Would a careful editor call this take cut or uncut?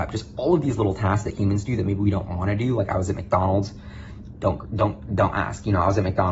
uncut